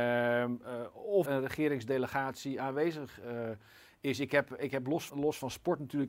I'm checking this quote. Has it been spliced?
yes; 2 cuts; at 1.2 s, 5.1 s

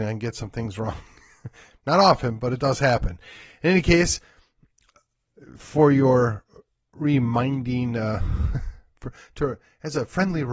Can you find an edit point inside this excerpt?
no; 0 cuts

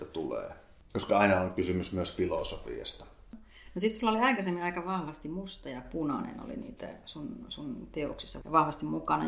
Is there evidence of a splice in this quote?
no; 0 cuts

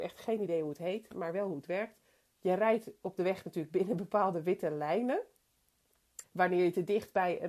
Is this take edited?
yes; 1 cut; at 6.2 s

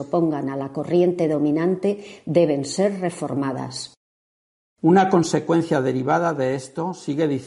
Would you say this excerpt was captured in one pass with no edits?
yes; 0 cuts

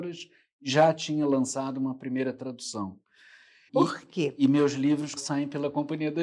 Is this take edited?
yes; 2 cuts; at 3.7 s, 5.2 s

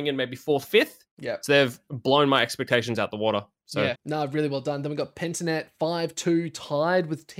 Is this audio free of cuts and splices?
no; 1 cut; at 3.9 s

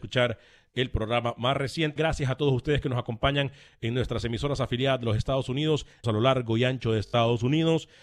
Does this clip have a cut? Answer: yes; 2 cuts; at 2.0 s, 6.0 s

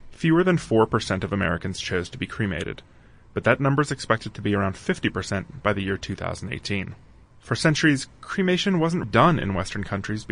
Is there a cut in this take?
yes; 1 cut; at 9.0 s

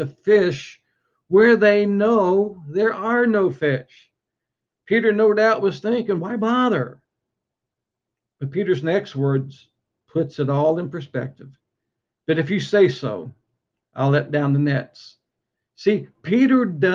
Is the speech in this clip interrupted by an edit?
no; 0 cuts

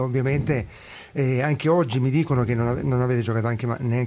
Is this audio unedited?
yes; 0 cuts

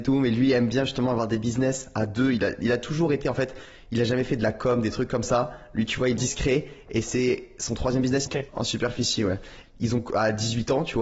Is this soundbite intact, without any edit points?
no; 3 cuts; at 6.2 s, 8.3 s, 9.6 s

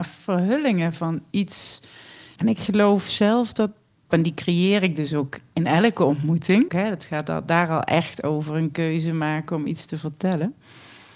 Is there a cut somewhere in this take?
yes; 3 cuts; at 2.4 s, 4.1 s, 6.7 s

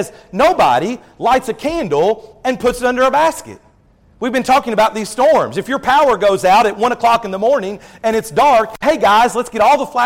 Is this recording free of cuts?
no; 1 cut; at 8.8 s

